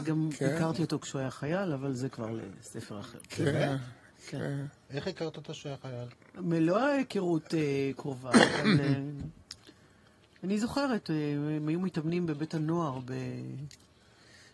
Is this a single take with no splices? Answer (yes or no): yes